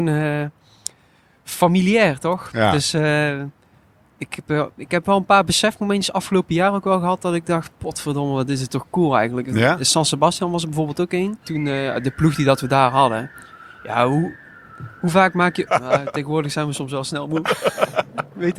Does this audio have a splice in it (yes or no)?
yes